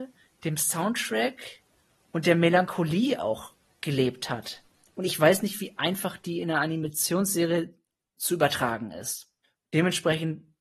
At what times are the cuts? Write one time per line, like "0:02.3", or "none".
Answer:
none

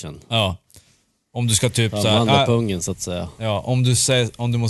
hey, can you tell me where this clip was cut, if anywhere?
none

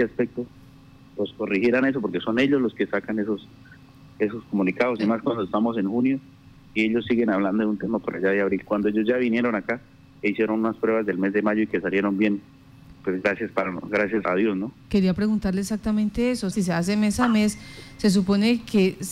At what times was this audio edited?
0:14.2
0:16.5

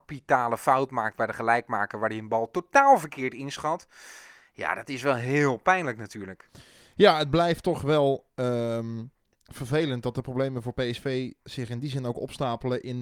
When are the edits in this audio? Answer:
none

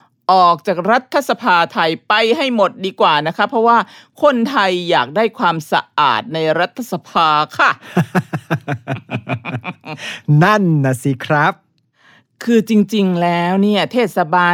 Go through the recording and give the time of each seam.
none

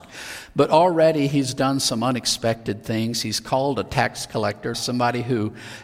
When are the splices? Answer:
0:04.7

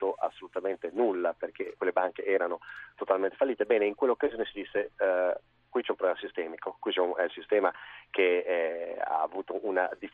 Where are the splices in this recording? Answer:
0:01.7

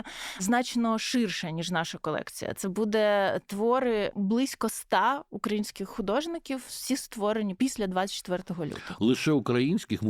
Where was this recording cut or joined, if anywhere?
none

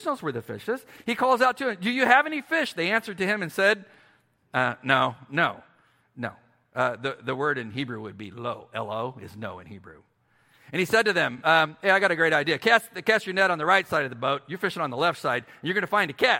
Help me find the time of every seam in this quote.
none

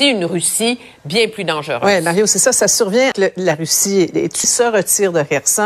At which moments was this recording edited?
0:03.1
0:04.4

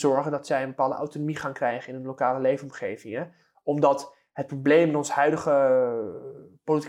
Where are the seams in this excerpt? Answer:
none

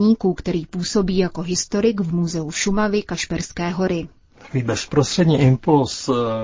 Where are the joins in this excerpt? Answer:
0:04.3

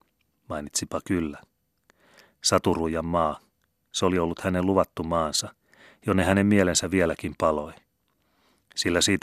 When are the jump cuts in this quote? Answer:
none

